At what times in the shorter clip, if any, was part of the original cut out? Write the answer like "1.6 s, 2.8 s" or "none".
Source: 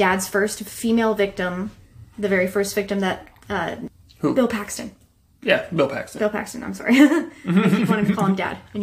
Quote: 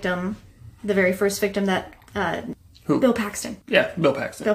3.6 s